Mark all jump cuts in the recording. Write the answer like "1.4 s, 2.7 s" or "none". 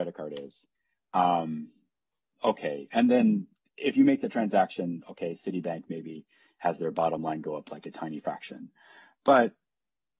none